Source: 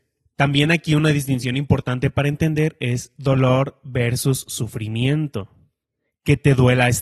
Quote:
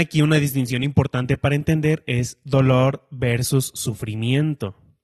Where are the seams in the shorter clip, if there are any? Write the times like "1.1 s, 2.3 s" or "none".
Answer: none